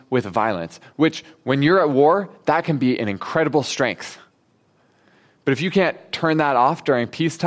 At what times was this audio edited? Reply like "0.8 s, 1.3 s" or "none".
none